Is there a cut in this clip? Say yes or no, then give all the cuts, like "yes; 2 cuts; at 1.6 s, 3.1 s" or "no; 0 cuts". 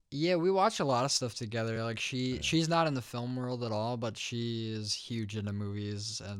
no; 0 cuts